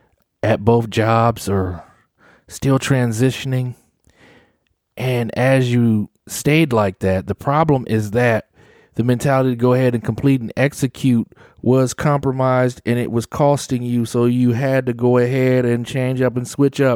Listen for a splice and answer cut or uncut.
uncut